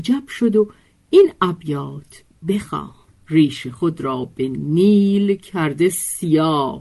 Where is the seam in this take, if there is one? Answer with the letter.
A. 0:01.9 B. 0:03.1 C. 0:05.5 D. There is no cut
B